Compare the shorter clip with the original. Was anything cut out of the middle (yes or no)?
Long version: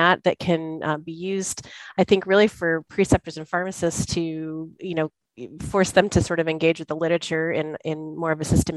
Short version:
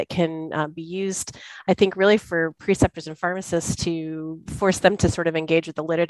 yes